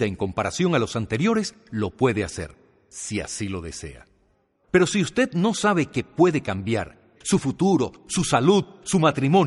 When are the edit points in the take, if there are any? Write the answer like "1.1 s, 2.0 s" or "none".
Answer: 4.6 s, 7.2 s